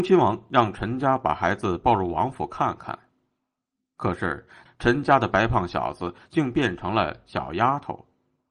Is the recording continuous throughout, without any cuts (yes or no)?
no